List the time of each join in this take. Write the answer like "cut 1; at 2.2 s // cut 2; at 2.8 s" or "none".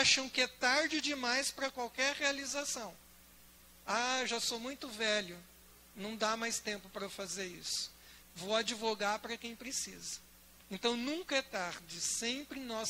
cut 1; at 8.2 s // cut 2; at 10.6 s